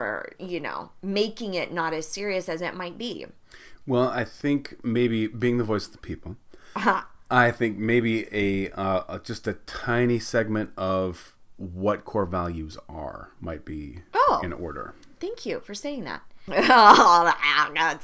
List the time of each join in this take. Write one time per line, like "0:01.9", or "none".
0:16.5